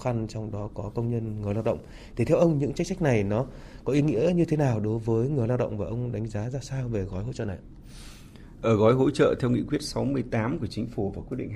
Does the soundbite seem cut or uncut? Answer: uncut